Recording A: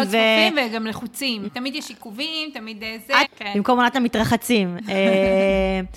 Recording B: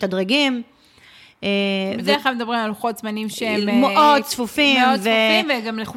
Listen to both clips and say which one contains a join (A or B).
A